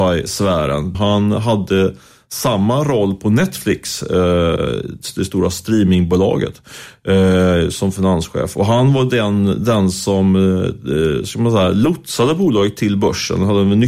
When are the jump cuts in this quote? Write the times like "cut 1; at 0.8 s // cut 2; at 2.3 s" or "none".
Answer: cut 1; at 0.9 s